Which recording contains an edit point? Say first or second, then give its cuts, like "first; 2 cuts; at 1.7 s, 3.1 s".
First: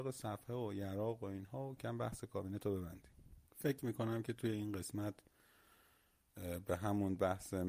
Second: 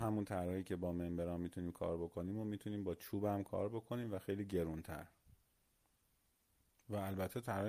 first; 2 cuts; at 1.8 s, 3.5 s